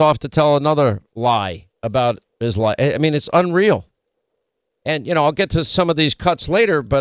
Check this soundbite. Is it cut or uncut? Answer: uncut